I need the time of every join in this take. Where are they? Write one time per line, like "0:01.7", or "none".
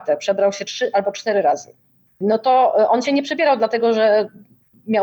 none